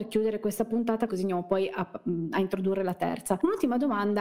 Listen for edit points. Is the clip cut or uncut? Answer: cut